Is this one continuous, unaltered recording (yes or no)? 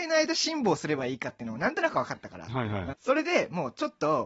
no